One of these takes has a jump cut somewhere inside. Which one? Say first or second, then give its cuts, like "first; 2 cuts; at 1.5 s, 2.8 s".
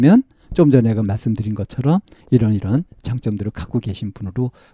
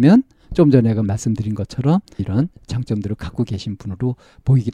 second; 1 cut; at 2.2 s